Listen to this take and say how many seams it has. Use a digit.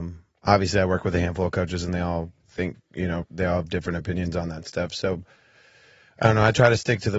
0